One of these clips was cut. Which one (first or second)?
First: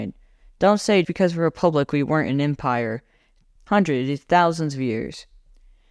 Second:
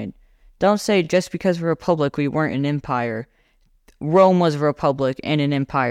first